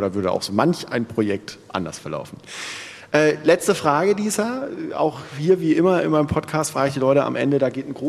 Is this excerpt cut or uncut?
uncut